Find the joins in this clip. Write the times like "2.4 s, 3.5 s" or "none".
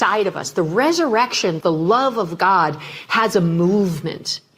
1.6 s